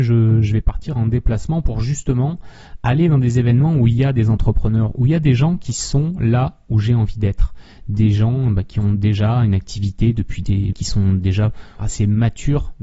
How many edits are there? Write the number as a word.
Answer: two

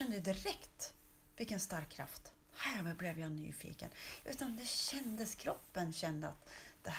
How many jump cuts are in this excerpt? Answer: two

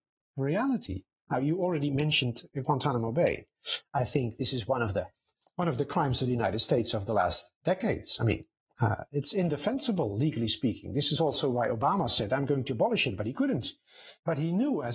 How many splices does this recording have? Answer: one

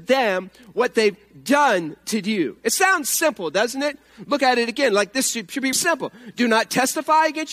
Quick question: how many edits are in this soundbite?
one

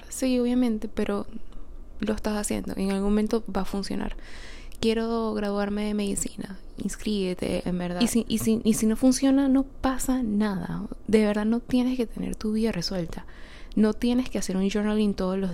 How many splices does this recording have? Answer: one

